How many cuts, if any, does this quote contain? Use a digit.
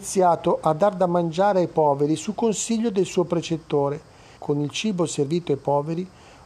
1